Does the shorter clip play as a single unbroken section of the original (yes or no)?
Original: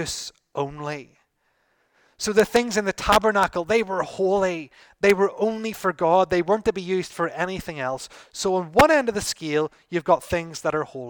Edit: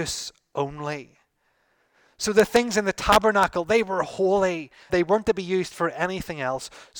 no